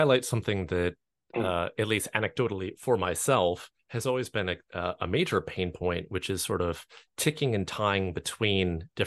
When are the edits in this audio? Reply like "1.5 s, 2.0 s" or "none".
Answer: none